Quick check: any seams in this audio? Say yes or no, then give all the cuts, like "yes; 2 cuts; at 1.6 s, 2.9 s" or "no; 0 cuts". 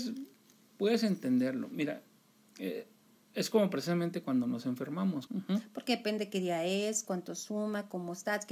yes; 2 cuts; at 5.3 s, 7.0 s